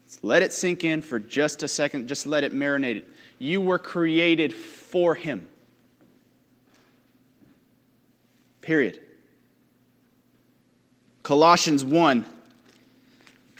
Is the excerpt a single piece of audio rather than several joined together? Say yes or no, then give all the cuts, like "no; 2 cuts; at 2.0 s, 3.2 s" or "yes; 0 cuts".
no; 1 cut; at 11.2 s